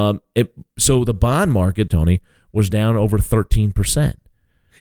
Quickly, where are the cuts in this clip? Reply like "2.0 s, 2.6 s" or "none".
1.9 s